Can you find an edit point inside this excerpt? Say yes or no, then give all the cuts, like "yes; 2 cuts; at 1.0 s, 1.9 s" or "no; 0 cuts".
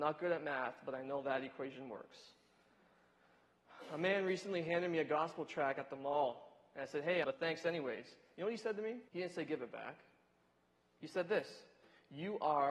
yes; 2 cuts; at 7.2 s, 9.1 s